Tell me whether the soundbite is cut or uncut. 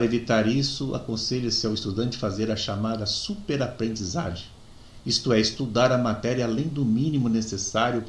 uncut